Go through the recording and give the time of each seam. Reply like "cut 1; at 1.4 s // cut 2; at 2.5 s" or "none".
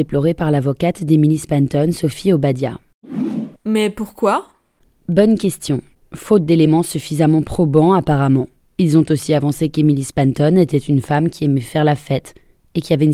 cut 1; at 3.6 s // cut 2; at 8.6 s

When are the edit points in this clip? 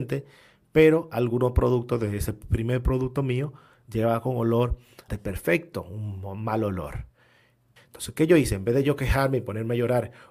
cut 1; at 5.1 s // cut 2; at 7.8 s

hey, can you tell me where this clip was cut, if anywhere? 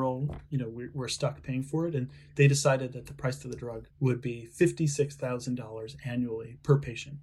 cut 1; at 3.9 s

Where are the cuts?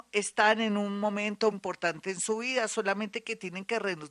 cut 1; at 1.5 s

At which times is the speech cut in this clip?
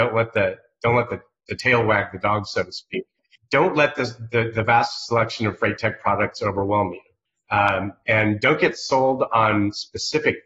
cut 1; at 3.4 s

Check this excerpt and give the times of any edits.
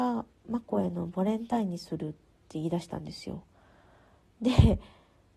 none

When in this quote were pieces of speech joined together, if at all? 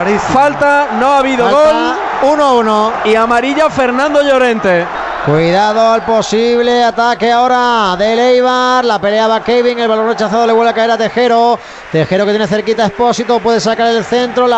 none

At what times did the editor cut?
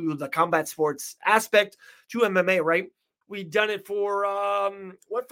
cut 1; at 3.2 s

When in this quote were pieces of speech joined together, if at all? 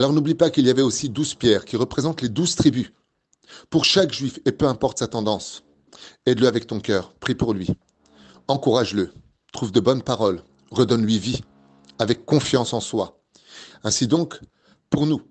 cut 1; at 13.7 s

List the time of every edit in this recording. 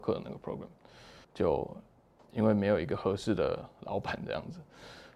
cut 1; at 1.2 s

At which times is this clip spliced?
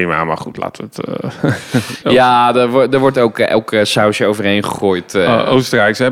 none

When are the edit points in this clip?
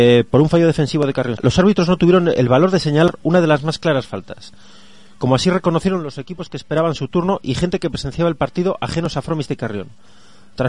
cut 1; at 1.4 s

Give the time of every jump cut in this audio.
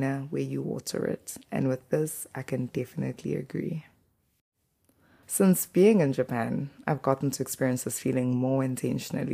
cut 1; at 5.2 s

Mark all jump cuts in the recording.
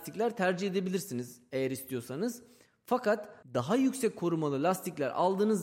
cut 1; at 3.4 s

